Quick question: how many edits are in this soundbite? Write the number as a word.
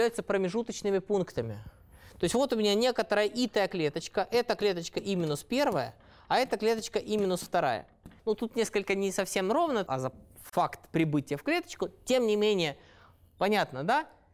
two